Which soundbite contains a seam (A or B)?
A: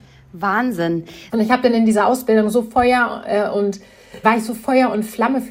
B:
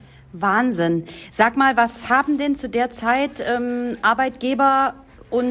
A